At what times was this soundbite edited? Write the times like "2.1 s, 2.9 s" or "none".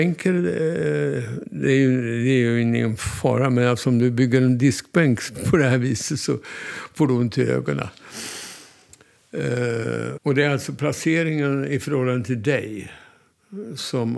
5.3 s, 10.2 s

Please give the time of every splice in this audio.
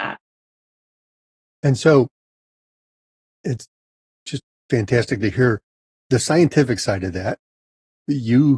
none

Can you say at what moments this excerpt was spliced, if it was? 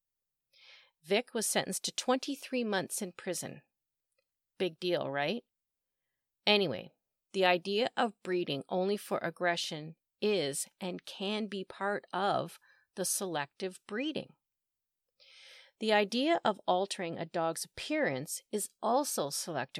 none

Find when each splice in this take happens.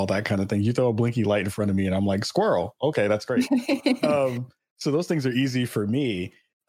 none

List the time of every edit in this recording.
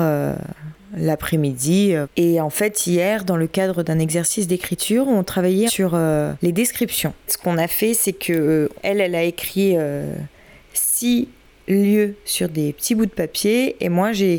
none

